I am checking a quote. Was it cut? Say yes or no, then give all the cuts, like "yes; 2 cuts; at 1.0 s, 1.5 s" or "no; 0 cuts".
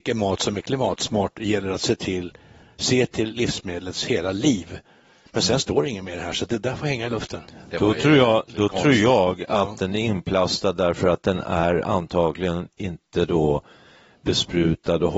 no; 0 cuts